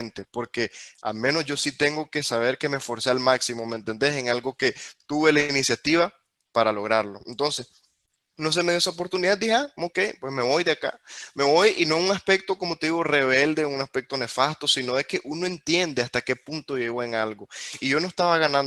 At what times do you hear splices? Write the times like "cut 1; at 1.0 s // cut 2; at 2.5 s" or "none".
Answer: none

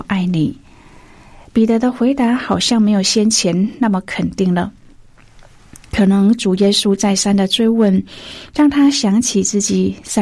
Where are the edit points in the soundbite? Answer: none

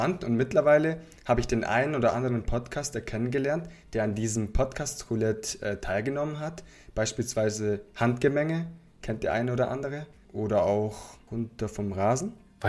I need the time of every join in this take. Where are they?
none

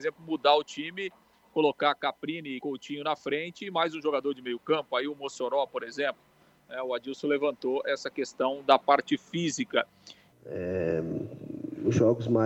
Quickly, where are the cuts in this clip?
cut 1; at 10.3 s

